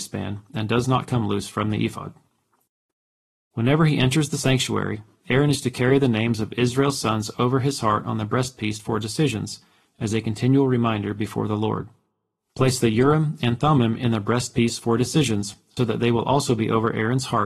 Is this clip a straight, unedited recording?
no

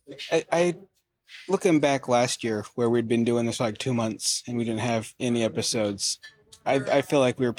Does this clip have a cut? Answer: no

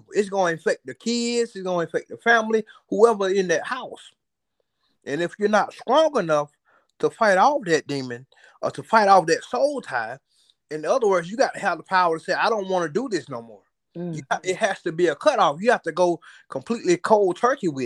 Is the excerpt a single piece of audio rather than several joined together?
yes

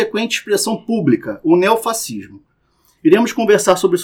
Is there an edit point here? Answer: no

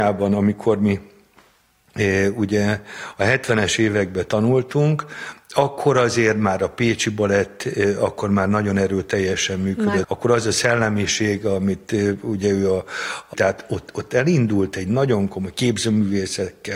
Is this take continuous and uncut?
no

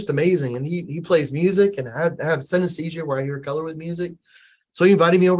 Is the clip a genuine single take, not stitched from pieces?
yes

